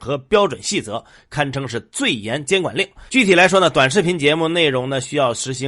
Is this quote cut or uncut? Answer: cut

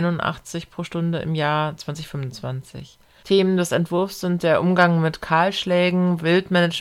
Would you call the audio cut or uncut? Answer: cut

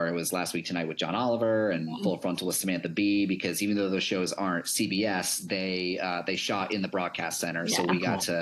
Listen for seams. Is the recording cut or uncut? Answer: uncut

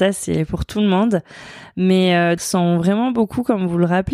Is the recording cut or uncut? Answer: cut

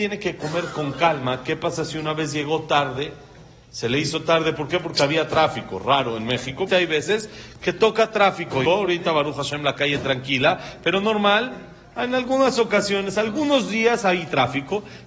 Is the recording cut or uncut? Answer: cut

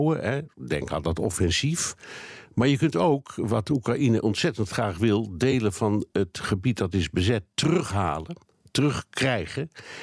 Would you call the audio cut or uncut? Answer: uncut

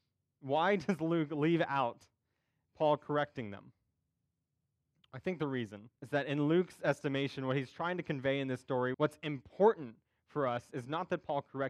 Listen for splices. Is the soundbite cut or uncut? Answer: cut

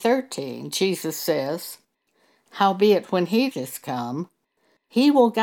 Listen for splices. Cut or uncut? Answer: cut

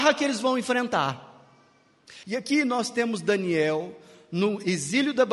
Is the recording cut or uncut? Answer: cut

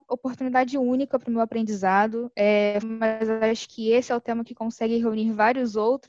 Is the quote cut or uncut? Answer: cut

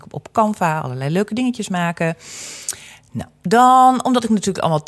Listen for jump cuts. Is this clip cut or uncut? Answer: uncut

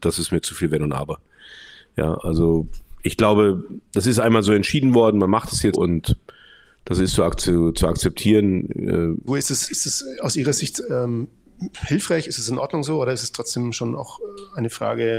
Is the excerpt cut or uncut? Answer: cut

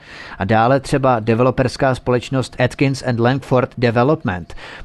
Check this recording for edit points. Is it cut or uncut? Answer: uncut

